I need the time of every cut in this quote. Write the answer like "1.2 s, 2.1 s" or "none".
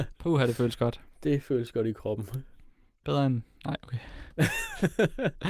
none